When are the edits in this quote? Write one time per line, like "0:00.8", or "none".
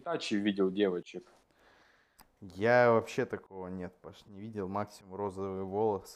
none